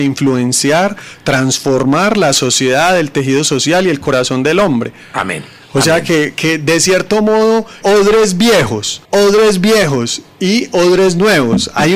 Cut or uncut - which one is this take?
cut